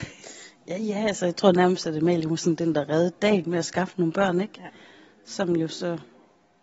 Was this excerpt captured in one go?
yes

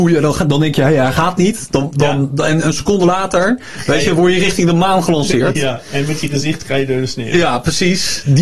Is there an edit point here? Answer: no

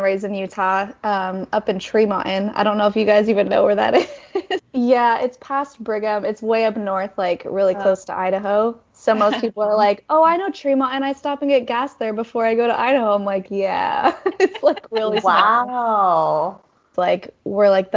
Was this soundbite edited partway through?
yes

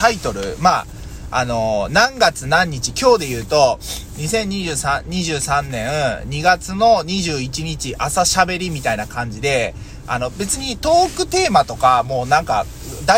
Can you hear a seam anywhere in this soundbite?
no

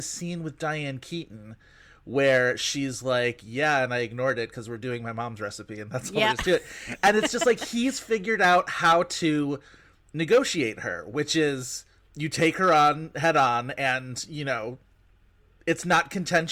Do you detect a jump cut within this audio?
yes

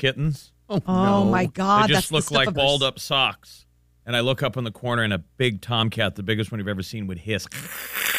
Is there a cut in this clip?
yes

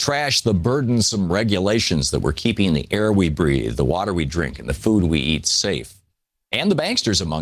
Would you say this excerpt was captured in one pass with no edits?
yes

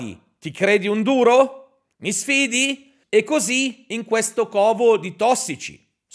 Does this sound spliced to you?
yes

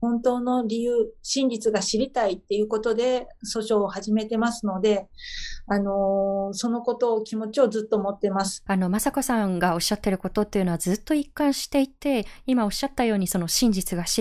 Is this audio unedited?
no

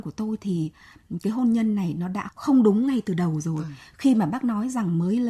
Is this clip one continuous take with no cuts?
no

